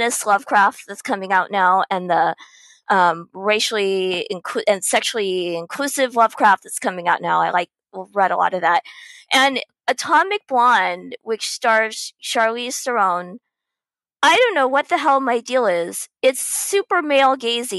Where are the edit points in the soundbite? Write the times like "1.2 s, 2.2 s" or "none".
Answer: none